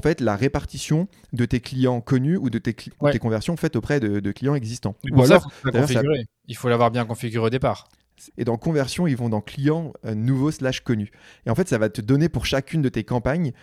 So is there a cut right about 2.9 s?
yes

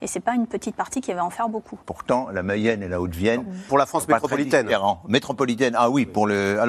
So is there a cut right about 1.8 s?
yes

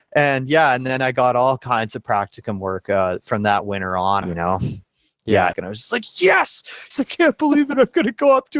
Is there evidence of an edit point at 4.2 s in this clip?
yes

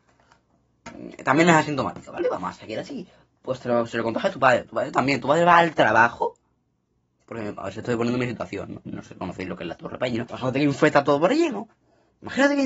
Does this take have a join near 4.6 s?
no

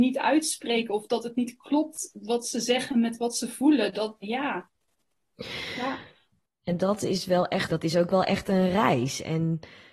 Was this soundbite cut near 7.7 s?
yes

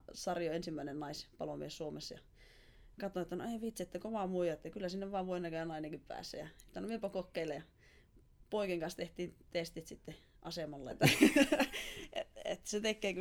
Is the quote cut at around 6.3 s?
no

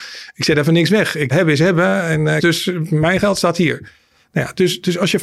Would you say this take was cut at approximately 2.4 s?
yes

